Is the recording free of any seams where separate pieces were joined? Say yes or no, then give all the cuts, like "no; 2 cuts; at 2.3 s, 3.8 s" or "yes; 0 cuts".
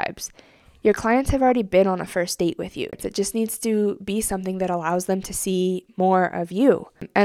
no; 1 cut; at 2.9 s